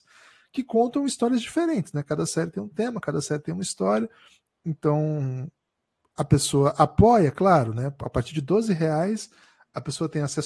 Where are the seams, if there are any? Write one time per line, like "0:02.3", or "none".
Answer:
none